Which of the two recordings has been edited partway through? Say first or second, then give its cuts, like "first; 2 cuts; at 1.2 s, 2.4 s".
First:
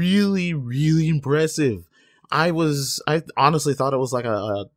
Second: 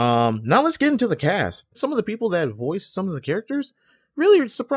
second; 1 cut; at 1.7 s